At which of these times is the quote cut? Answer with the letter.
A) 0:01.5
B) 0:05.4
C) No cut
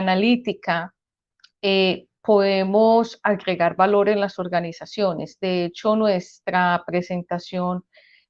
C